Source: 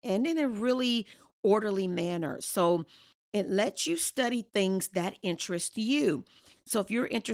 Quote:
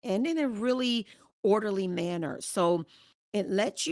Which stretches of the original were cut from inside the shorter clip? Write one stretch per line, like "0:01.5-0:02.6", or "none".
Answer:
none